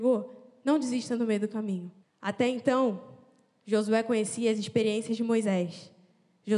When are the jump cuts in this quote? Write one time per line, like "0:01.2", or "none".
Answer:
0:02.0